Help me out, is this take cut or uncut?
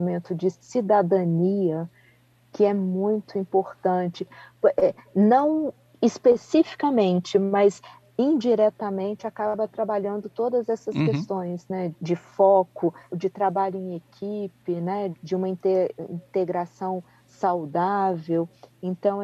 cut